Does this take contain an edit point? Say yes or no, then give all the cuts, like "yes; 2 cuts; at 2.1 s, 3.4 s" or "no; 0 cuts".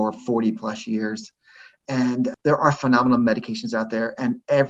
no; 0 cuts